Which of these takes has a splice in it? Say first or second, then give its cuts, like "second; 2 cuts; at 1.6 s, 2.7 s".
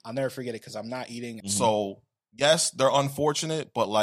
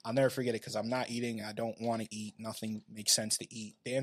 first; 1 cut; at 1.4 s